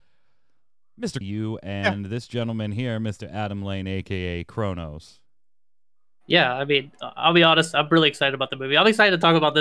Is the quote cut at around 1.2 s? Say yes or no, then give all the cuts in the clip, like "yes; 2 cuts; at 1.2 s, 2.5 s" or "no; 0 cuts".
yes; 1 cut; at 1.2 s